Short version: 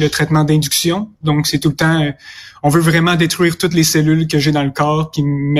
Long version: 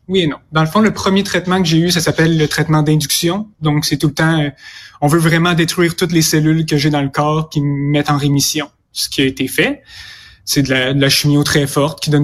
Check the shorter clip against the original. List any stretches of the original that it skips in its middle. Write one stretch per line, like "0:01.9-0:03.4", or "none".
none